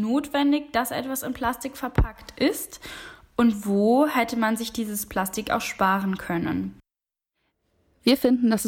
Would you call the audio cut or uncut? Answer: uncut